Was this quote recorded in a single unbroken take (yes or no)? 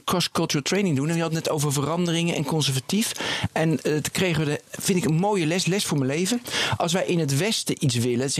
yes